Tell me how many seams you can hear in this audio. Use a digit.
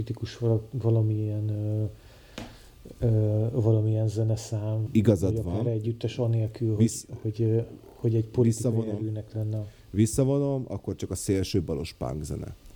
1